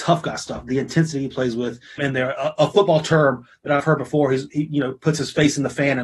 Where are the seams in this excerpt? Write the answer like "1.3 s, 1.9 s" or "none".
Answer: 2.0 s